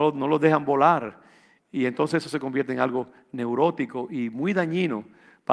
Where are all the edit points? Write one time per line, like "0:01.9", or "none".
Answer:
none